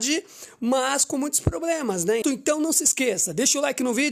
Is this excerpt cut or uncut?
cut